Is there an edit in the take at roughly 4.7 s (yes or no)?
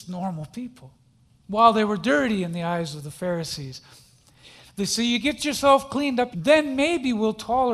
yes